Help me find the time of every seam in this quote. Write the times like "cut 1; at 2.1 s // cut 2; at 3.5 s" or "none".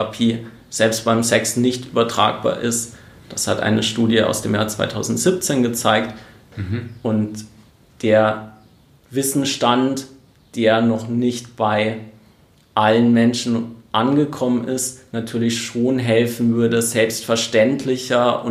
cut 1; at 6.5 s